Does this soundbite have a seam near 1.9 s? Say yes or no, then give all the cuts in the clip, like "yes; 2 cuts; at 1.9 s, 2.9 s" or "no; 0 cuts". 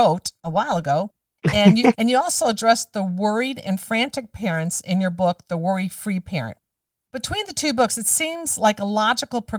yes; 1 cut; at 1.9 s